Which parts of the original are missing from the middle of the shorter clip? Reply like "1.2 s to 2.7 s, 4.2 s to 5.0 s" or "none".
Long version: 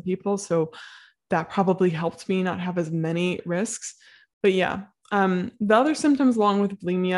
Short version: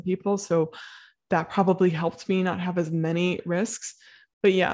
none